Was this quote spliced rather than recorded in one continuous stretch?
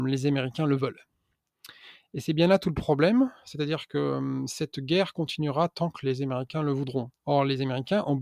yes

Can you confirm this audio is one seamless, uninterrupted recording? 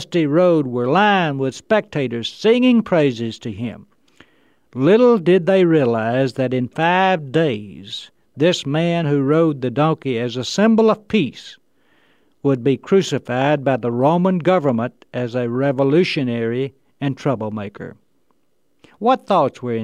yes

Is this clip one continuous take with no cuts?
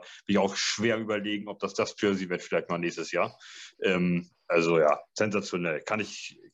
yes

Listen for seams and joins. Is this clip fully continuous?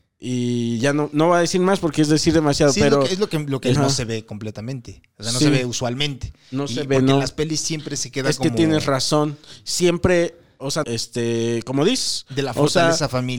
no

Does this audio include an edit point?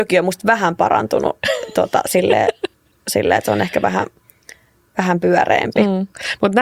no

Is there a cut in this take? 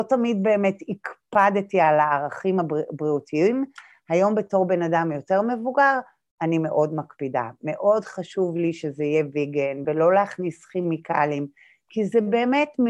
yes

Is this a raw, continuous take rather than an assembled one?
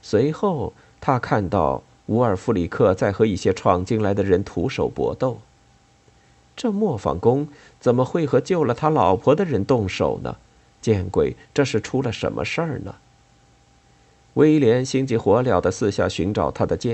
yes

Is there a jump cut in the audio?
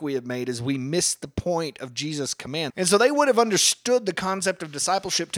yes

